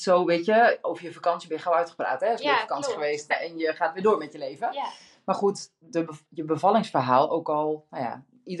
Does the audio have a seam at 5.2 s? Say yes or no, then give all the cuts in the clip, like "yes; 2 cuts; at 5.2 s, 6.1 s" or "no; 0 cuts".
no; 1 cut; at 3.3 s